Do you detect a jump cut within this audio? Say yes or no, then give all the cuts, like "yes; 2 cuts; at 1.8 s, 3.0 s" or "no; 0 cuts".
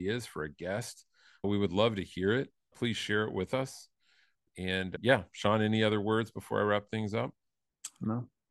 no; 0 cuts